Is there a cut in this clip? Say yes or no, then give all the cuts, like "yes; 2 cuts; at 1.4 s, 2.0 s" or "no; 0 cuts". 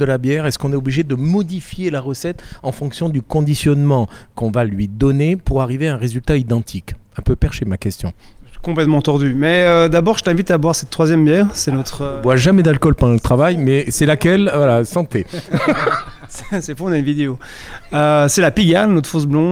no; 0 cuts